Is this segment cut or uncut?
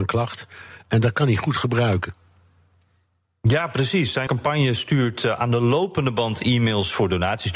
cut